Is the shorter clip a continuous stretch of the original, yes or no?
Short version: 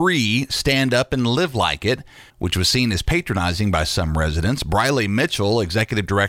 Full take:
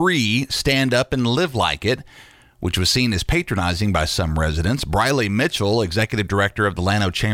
no